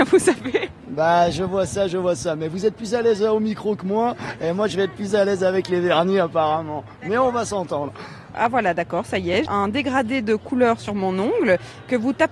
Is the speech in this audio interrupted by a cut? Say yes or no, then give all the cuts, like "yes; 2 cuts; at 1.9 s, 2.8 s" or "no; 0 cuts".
yes; 2 cuts; at 8.3 s, 9.5 s